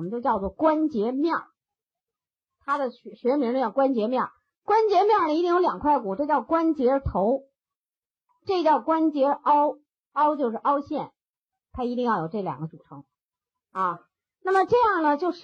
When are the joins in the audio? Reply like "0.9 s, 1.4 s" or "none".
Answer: none